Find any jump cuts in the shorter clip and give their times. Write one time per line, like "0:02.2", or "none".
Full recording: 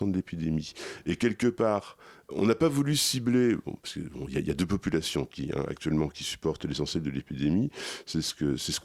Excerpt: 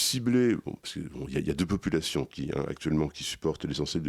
none